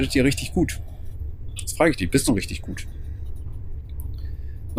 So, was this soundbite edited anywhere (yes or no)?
yes